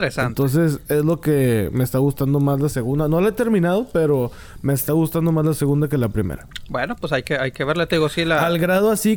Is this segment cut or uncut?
uncut